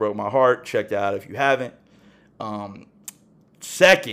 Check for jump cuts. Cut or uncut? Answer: uncut